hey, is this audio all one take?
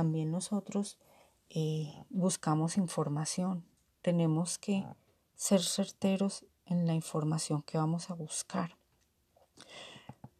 yes; 0 cuts

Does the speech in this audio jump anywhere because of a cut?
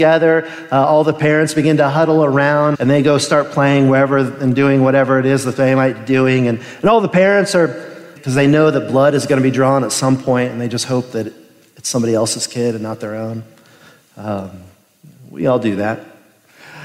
yes; 2 cuts; at 2.7 s, 8.2 s

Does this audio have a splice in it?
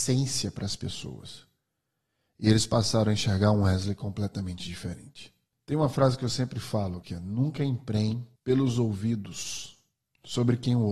yes; 3 cuts; at 5.5 s, 7.0 s, 8.4 s

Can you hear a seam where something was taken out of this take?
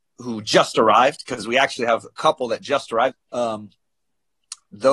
yes; 1 cut; at 3.1 s

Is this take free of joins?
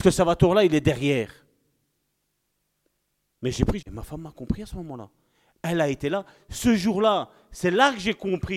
no; 1 cut; at 3.8 s

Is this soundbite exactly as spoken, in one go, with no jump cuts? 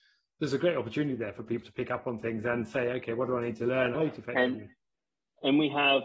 no; 2 cuts; at 1.6 s, 3.9 s

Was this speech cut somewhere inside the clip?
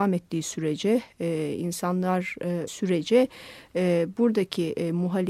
yes; 1 cut; at 2.7 s

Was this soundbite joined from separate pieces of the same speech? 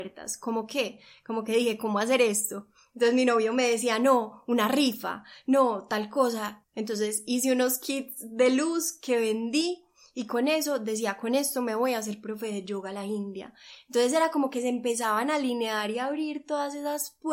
yes; 1 cut; at 6.6 s

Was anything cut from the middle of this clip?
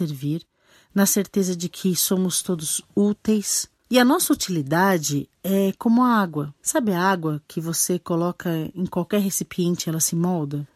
no; 0 cuts

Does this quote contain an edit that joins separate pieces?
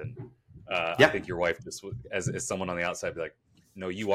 no; 0 cuts

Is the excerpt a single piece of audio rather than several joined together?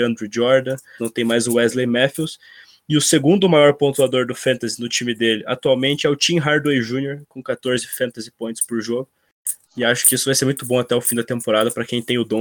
no; 2 cuts; at 1.0 s, 9.6 s

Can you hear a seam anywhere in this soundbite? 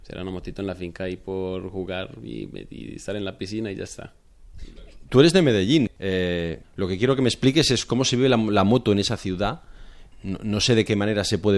no; 0 cuts

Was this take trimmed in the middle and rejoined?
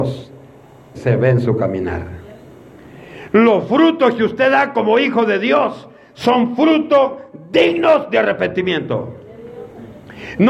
yes; 1 cut; at 0.9 s

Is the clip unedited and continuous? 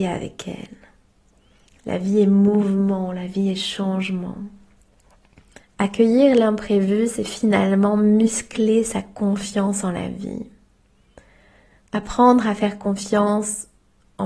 no; 1 cut; at 5.6 s

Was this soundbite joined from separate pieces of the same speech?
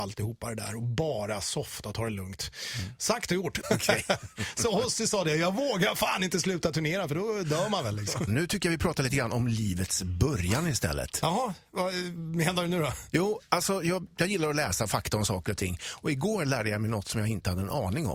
yes; 2 cuts; at 3.6 s, 8.3 s

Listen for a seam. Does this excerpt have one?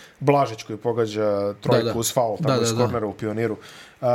no; 0 cuts

